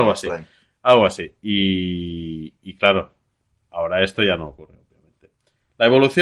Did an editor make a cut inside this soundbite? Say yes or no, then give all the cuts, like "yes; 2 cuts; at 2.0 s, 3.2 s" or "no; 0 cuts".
no; 0 cuts